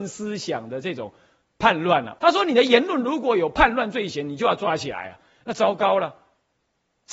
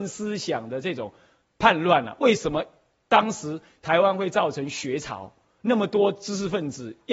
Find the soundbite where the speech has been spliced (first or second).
first